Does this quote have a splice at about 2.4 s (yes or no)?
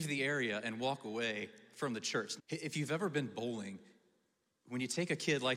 yes